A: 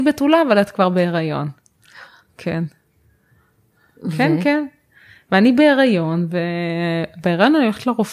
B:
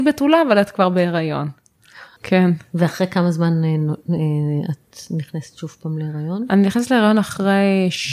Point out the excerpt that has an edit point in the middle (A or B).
B